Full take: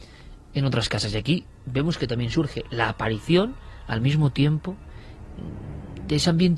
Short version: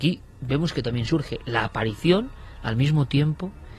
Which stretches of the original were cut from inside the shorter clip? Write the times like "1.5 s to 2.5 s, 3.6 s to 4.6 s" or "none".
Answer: none